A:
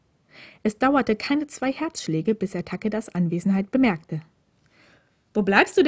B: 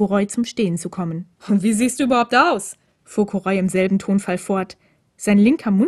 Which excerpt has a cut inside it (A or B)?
B